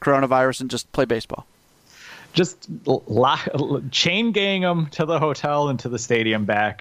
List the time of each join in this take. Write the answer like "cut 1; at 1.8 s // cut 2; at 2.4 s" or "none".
none